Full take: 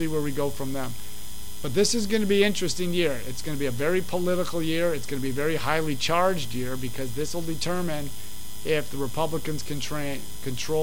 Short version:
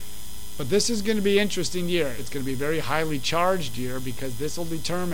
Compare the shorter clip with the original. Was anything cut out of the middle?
yes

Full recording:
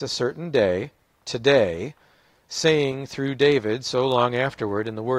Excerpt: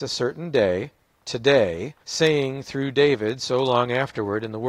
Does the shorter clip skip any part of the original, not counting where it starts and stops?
yes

